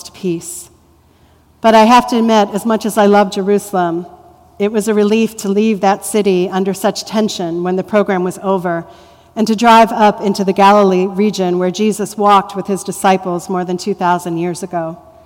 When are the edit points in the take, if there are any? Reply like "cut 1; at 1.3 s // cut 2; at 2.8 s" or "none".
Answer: none